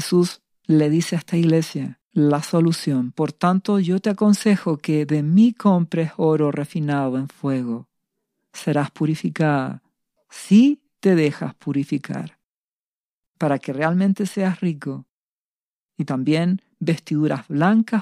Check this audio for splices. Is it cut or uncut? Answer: uncut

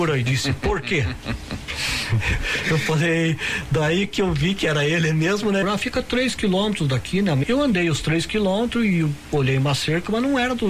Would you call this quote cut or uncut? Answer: cut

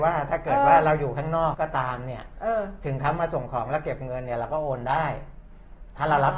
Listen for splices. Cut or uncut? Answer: cut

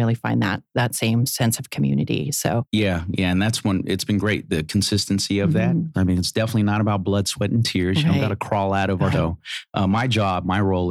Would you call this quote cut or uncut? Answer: cut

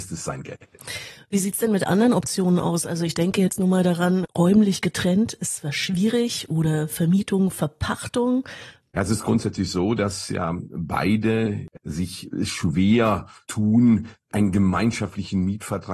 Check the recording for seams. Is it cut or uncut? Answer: cut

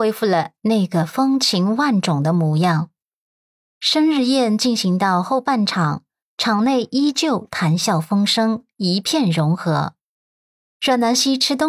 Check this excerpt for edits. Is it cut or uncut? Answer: uncut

